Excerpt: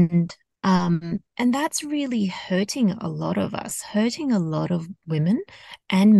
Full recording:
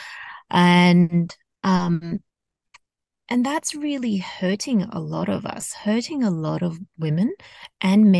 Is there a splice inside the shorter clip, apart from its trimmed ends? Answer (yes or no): yes